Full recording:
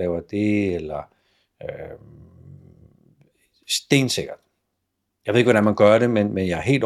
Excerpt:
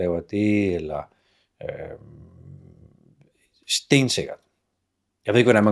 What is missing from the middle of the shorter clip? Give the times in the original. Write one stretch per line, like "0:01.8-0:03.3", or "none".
none